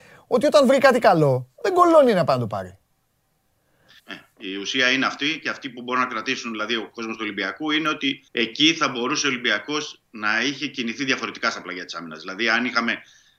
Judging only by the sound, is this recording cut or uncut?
cut